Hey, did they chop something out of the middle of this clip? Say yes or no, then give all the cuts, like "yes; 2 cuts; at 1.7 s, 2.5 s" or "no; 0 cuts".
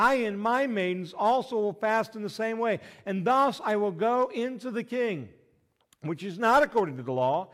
no; 0 cuts